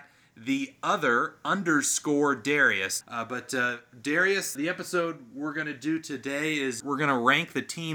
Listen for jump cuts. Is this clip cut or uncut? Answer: cut